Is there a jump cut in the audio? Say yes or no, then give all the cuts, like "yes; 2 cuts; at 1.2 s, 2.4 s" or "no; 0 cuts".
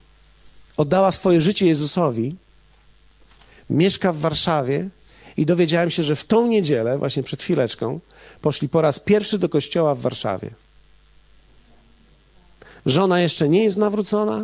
no; 0 cuts